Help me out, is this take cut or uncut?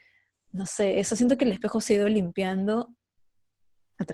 uncut